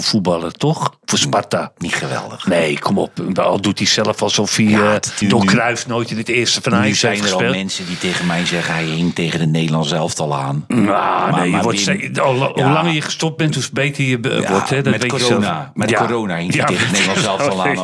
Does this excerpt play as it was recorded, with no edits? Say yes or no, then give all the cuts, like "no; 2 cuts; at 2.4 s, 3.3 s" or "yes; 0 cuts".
no; 1 cut; at 5.2 s